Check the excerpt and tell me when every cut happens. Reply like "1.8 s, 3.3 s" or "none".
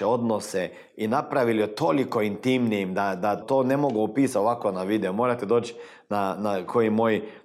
3.4 s